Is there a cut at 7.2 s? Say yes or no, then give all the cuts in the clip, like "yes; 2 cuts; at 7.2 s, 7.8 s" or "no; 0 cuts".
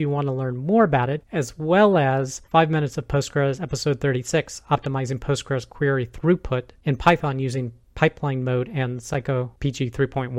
no; 2 cuts; at 1.2 s, 2.5 s